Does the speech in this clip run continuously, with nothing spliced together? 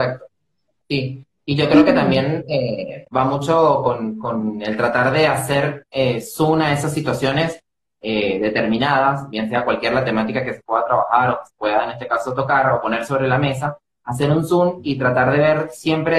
yes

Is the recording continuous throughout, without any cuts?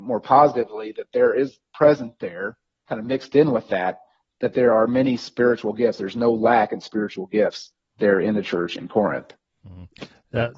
yes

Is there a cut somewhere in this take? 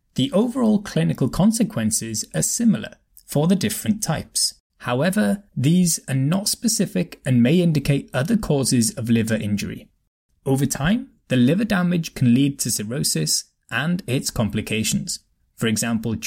yes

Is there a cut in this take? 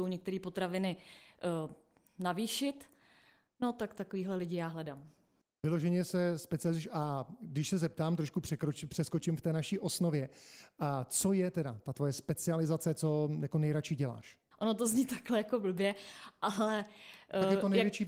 yes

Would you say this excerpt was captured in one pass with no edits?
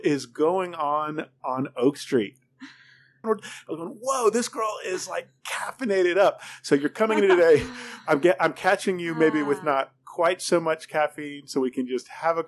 no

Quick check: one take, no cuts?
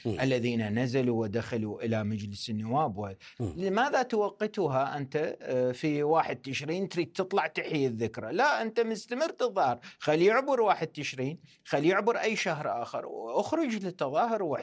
no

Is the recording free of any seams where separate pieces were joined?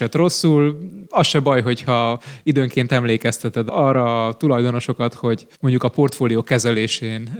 no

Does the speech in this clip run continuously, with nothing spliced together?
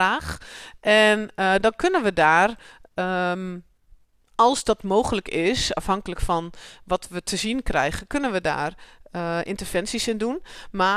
yes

